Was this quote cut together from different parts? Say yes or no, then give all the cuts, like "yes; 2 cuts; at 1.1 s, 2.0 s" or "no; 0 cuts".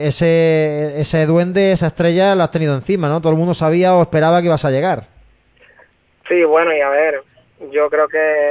no; 0 cuts